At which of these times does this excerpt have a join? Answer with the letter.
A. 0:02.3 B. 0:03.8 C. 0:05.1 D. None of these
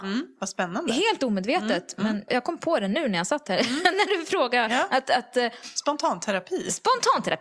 A